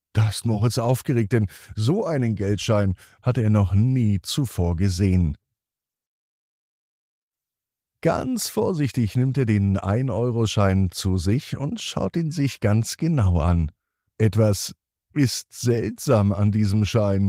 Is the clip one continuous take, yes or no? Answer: yes